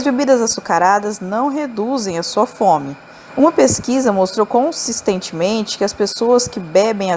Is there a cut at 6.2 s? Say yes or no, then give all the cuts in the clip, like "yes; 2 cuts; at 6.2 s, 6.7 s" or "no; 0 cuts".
no; 1 cut; at 3.3 s